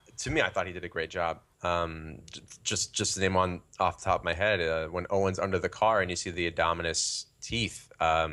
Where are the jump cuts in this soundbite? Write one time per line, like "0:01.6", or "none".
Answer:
0:01.5